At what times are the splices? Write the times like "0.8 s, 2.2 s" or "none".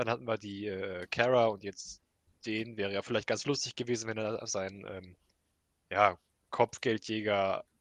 none